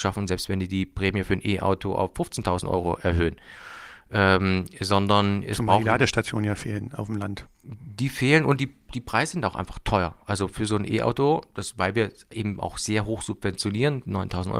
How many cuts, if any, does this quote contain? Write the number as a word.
one